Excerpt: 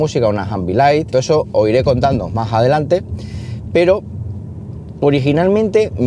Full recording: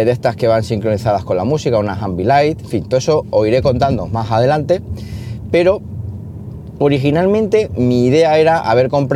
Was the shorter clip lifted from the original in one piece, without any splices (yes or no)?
no